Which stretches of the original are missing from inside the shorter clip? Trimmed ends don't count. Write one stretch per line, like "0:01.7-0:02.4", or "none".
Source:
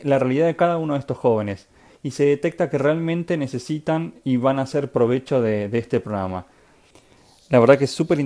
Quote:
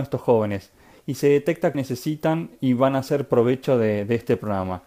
0:02.7-0:03.4